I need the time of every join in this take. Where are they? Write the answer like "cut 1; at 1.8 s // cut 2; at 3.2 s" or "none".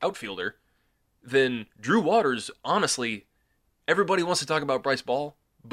none